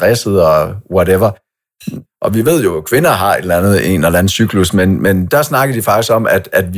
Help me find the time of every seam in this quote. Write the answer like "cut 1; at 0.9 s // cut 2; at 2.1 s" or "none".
cut 1; at 2.0 s